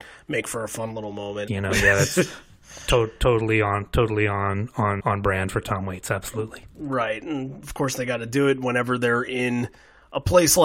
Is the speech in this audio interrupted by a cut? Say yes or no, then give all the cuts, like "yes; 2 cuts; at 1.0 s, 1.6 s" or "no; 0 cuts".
yes; 2 cuts; at 1.5 s, 5.0 s